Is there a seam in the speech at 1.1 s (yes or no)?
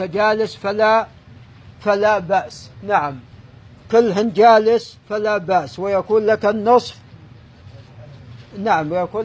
no